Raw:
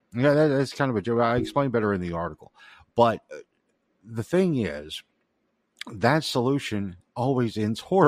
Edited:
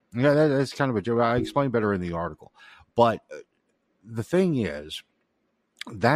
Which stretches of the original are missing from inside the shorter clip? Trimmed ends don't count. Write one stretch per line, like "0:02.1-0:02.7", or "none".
none